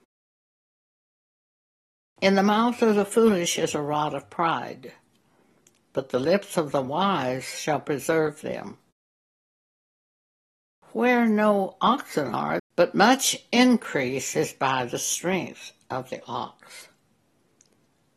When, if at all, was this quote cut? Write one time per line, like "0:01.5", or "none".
0:12.6